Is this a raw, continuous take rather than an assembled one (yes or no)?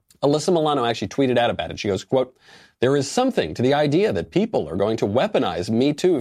yes